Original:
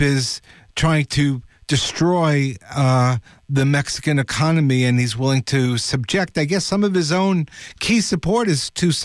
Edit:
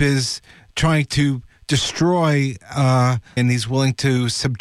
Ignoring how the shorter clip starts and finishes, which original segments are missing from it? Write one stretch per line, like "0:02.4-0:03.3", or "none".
0:03.4-0:04.9